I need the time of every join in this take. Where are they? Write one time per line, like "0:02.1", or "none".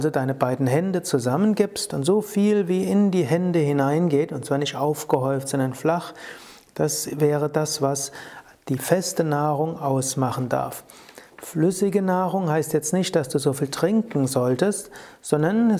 none